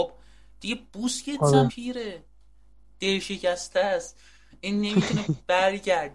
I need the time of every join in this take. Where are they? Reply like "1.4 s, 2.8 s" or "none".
1.7 s